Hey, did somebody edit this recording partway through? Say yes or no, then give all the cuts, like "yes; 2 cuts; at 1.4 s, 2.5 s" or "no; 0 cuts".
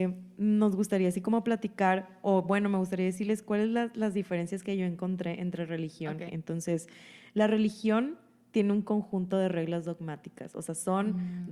yes; 1 cut; at 6.3 s